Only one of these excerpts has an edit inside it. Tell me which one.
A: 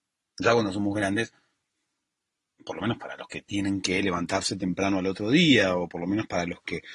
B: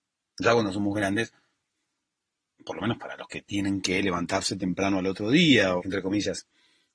B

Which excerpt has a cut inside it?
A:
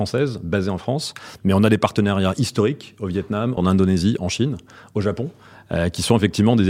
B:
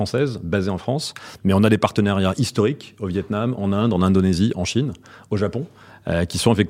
A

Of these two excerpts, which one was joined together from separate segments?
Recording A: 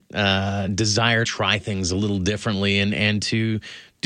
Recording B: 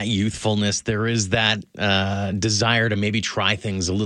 A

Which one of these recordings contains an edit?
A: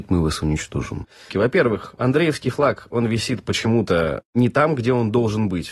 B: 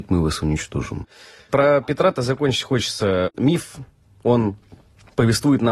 A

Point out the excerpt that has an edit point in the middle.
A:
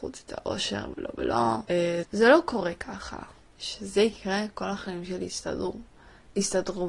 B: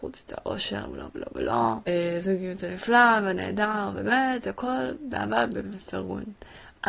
A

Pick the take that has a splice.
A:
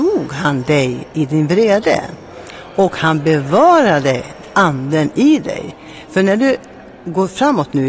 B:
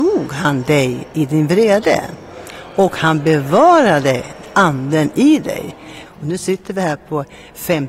B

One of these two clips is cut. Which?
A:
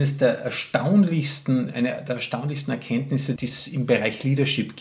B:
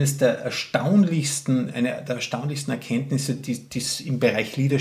A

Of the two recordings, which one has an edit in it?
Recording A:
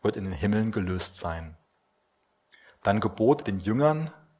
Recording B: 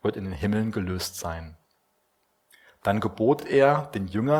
A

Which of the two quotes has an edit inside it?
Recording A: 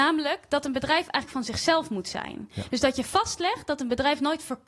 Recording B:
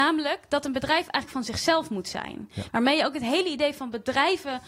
B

